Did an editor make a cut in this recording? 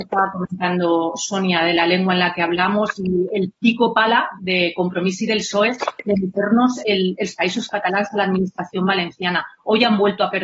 yes; 2 cuts; at 3.0 s, 4.4 s

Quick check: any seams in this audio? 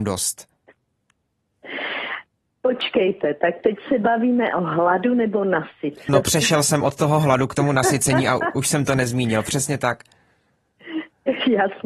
yes; 2 cuts; at 6.1 s, 8.5 s

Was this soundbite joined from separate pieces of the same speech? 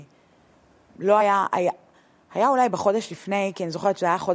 no; 0 cuts

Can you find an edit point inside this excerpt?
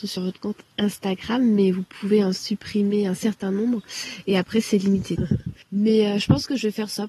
yes; 1 cut; at 5.2 s

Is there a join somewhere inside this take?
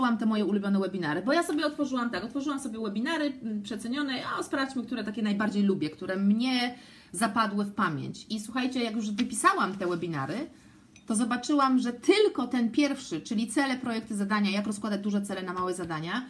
no; 0 cuts

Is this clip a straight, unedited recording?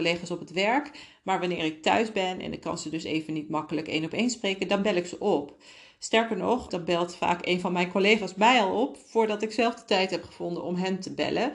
no; 1 cut; at 6.7 s

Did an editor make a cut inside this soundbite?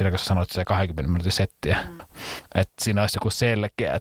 yes; 1 cut; at 2.0 s

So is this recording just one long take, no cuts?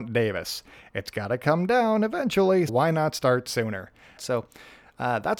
no; 2 cuts; at 2.7 s, 4.2 s

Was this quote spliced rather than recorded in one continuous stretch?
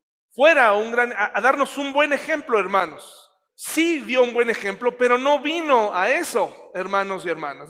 yes; 1 cut; at 3.5 s

